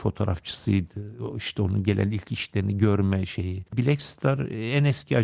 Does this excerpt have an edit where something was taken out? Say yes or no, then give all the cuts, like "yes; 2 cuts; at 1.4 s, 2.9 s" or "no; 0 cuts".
yes; 1 cut; at 3.7 s